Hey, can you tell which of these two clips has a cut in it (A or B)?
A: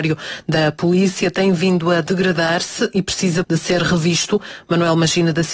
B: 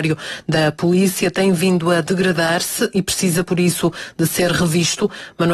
A